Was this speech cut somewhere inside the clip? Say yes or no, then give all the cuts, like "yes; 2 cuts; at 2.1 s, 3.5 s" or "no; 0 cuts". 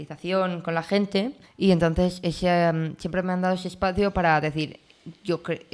yes; 1 cut; at 1.4 s